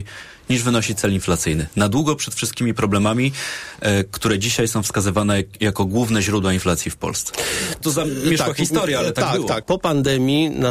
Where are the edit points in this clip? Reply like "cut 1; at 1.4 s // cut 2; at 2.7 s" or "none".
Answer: cut 1; at 7.8 s // cut 2; at 9.6 s